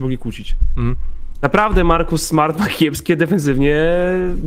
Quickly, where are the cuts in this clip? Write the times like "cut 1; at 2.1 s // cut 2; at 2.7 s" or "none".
none